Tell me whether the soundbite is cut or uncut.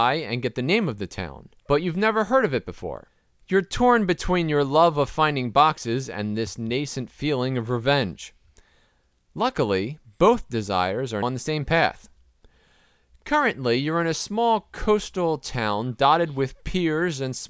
cut